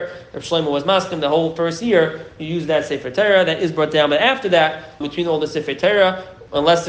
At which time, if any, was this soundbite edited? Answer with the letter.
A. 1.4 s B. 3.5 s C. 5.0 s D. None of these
C